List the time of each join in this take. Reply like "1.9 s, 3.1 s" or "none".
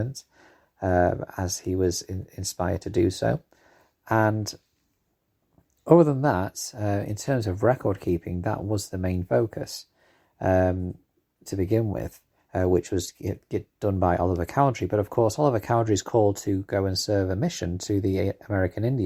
12.4 s